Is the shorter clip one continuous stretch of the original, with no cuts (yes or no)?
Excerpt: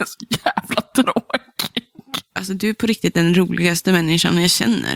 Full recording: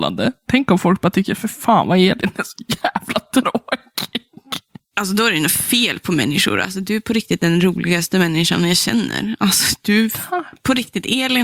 no